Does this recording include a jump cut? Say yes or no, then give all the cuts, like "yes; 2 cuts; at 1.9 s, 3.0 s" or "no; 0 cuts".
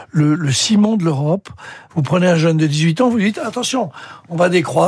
yes; 1 cut; at 1.9 s